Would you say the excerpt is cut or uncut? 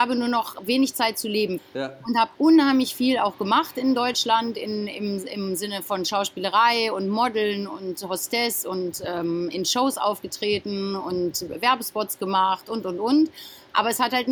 cut